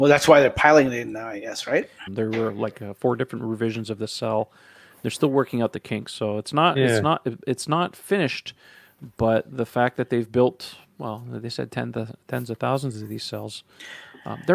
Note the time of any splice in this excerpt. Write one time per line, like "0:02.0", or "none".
0:02.1